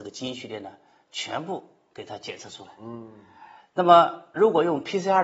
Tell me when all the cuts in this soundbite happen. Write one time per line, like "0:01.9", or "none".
none